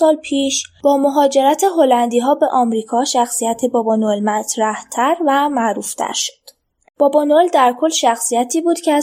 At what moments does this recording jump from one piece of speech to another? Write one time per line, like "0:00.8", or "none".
0:06.9